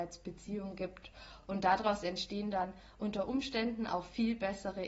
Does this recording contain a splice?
no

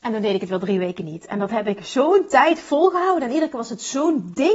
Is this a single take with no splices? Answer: yes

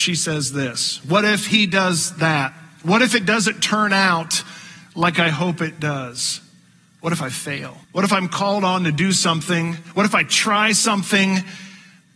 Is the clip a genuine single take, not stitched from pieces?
no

